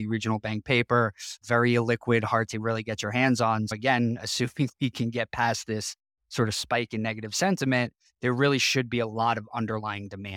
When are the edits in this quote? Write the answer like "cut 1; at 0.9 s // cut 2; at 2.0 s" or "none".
cut 1; at 3.7 s

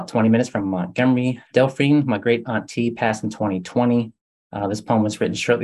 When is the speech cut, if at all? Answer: cut 1; at 1.5 s

